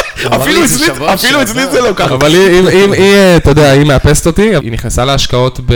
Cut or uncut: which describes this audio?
cut